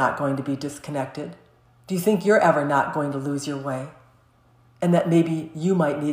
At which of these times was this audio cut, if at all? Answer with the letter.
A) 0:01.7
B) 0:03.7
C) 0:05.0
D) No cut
D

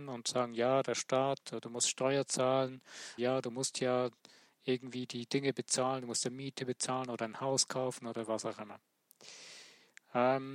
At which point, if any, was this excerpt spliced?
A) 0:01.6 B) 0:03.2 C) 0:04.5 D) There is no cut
B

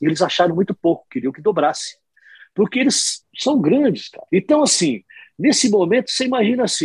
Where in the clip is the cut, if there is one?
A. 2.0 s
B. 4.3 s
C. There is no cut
B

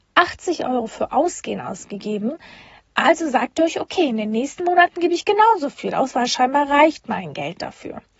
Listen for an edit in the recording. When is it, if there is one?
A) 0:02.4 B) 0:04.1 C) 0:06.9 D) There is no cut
D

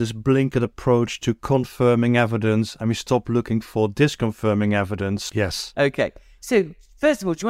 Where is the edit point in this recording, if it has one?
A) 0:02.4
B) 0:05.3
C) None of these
B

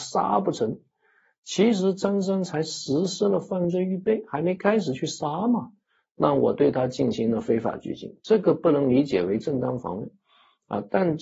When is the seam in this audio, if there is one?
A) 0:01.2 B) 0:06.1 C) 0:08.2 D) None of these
D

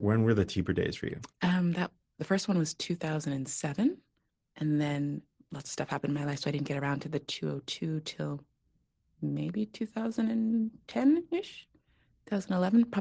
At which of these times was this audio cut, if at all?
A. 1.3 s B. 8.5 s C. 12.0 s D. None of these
D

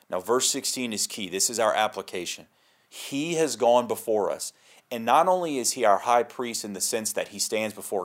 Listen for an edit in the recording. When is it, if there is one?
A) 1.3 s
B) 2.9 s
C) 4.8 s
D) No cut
B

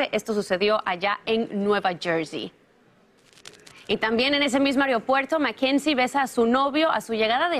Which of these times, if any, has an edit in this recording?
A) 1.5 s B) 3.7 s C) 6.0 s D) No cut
D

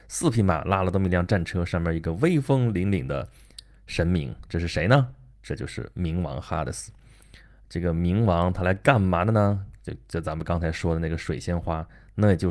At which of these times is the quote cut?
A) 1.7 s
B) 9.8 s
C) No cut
C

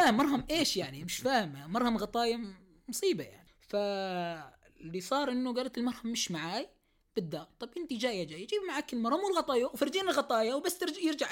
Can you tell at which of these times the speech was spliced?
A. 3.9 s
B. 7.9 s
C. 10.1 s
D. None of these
D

